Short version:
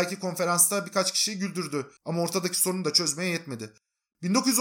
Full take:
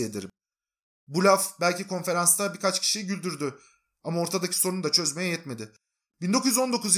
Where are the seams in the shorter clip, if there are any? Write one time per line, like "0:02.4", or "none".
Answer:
0:02.0